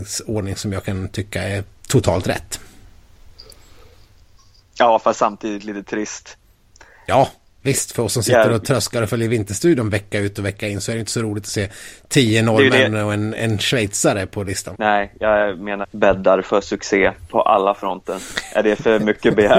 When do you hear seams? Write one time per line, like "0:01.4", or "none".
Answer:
0:14.7
0:15.8